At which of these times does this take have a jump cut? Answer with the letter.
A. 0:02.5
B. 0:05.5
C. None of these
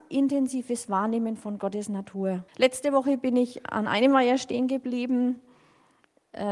A